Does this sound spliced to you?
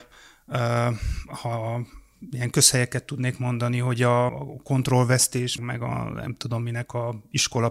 yes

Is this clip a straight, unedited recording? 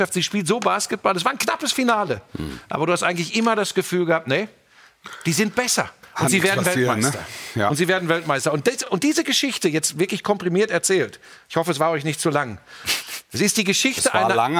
yes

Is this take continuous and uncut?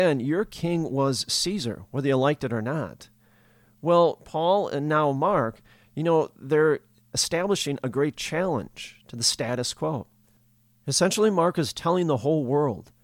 yes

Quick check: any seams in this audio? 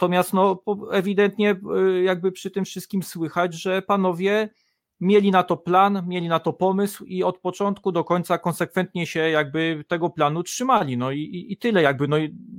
no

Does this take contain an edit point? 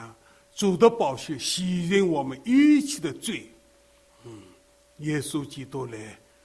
yes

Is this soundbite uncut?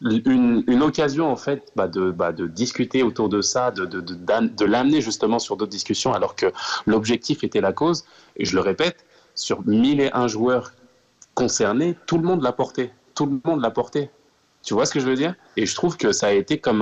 no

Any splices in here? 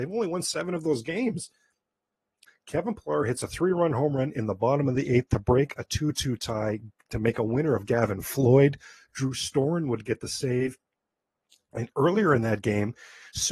yes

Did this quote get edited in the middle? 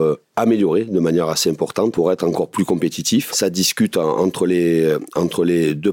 yes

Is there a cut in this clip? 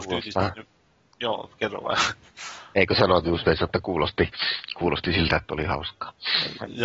no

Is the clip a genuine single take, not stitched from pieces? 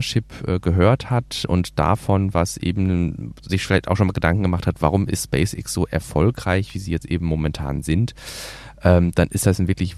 yes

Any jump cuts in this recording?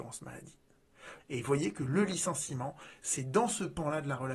yes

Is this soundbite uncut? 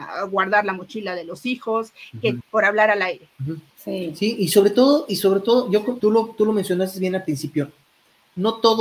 no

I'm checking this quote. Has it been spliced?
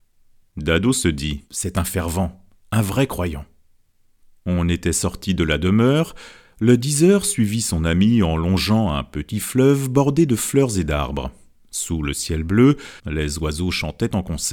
yes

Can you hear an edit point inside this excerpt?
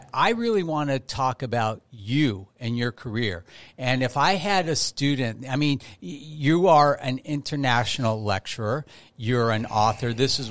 no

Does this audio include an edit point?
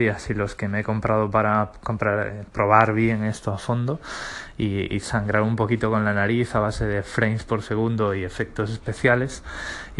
yes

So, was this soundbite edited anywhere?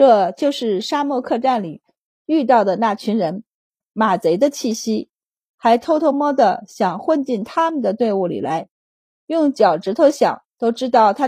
yes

